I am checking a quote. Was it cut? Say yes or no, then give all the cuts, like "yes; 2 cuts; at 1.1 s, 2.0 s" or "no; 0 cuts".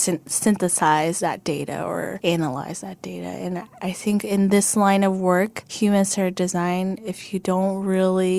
no; 0 cuts